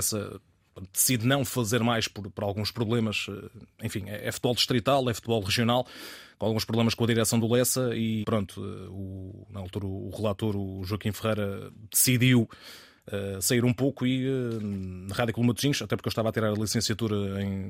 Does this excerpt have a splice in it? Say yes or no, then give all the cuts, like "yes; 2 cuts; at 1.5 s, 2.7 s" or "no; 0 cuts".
no; 0 cuts